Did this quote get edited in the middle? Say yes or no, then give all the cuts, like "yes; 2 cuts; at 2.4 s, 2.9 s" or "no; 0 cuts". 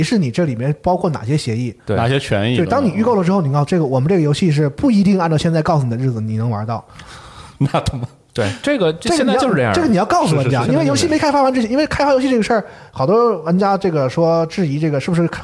no; 0 cuts